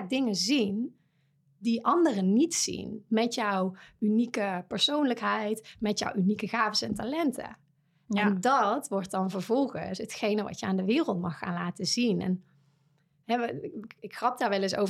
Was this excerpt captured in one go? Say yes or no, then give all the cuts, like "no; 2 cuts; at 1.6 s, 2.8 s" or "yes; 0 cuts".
yes; 0 cuts